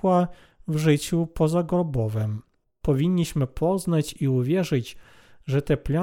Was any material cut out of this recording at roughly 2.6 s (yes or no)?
yes